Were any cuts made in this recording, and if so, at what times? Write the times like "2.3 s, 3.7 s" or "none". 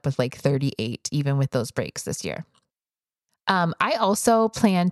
none